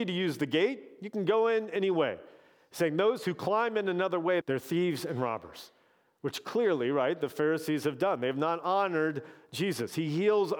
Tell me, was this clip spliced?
yes; 1 cut; at 4.4 s

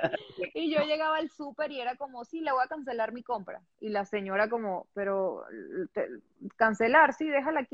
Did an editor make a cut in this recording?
no; 0 cuts

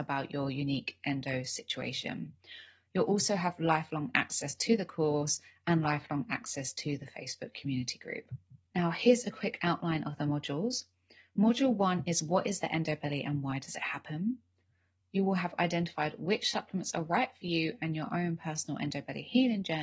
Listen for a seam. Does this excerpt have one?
yes; 2 cuts; at 8.6 s, 15.0 s

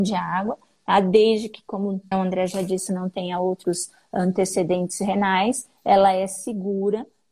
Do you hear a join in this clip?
yes; 1 cut; at 2.1 s

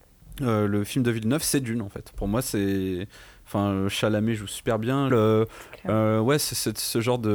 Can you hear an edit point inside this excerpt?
yes; 1 cut; at 5.1 s

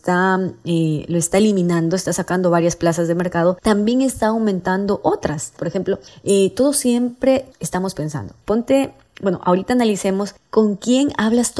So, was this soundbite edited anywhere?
yes; 1 cut; at 5.6 s

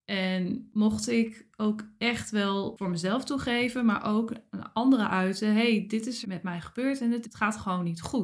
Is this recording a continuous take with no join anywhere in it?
no; 2 cuts; at 6.2 s, 7.2 s

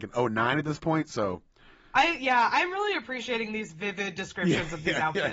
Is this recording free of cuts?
yes; 0 cuts

